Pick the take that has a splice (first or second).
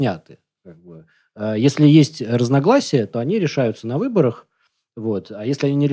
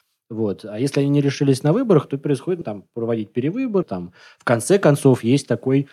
second